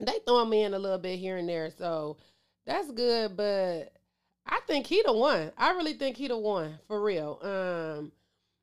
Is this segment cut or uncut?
uncut